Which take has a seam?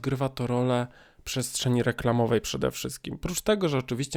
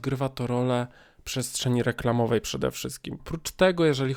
second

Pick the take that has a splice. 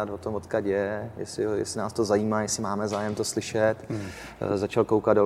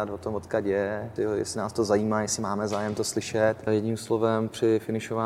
second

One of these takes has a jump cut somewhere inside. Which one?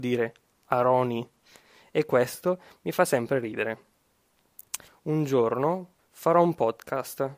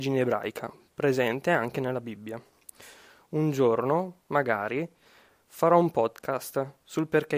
first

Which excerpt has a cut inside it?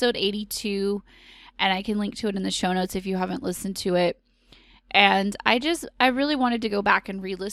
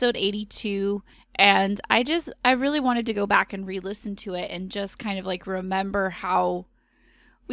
second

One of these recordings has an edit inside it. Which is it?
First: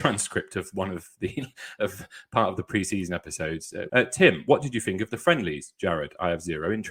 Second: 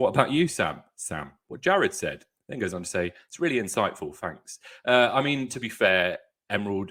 first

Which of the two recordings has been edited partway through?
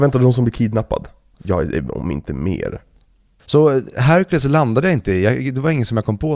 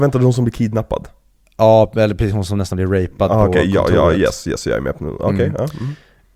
first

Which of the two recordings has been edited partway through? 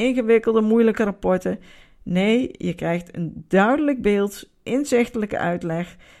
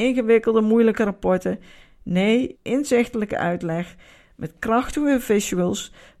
second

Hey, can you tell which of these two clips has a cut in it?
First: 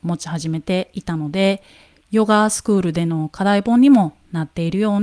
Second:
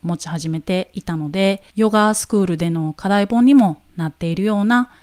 second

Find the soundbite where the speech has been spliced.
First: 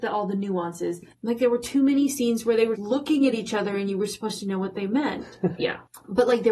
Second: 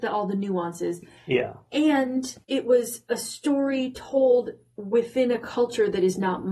first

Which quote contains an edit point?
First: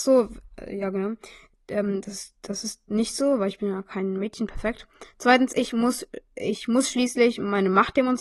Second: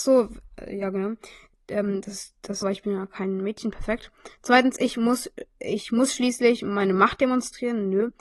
second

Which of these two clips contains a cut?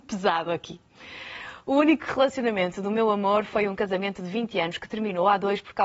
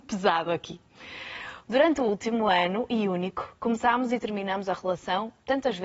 second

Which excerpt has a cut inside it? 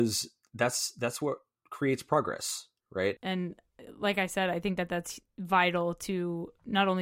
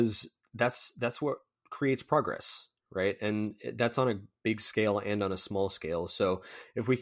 first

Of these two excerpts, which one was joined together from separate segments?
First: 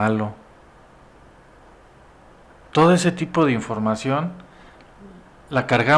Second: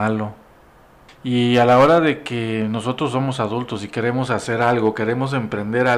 second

